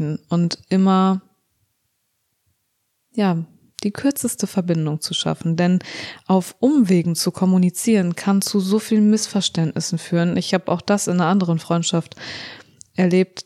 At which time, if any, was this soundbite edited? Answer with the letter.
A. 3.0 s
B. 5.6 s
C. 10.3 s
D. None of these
D